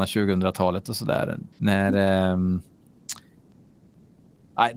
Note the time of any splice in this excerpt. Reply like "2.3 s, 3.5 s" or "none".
1.5 s